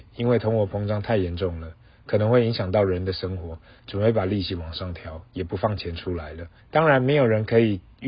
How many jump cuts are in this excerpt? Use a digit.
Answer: 1